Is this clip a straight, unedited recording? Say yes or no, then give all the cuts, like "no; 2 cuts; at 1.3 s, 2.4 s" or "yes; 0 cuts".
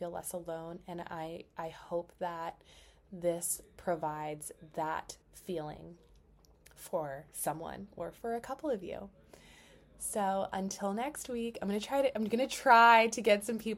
no; 1 cut; at 5.2 s